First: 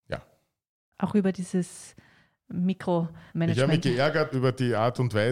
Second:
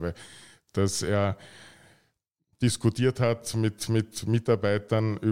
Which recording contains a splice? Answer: first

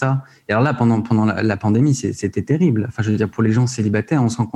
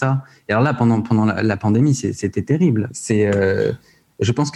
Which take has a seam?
second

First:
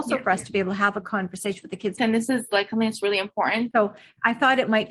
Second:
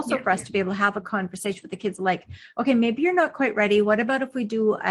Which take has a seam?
first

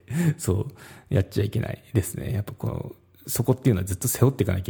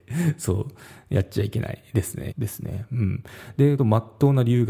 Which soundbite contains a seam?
second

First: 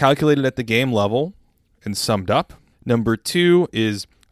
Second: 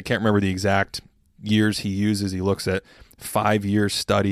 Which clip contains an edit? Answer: first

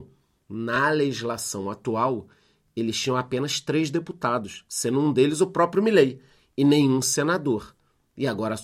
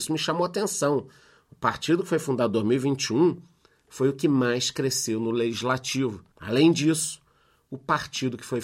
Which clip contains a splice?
second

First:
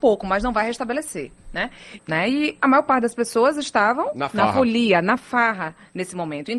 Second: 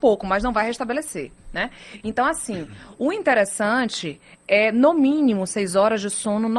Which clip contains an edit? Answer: first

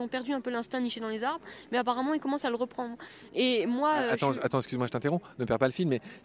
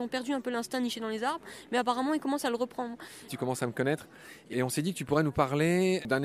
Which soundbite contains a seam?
second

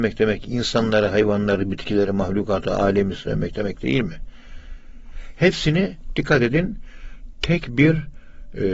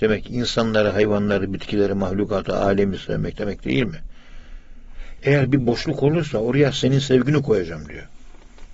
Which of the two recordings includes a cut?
second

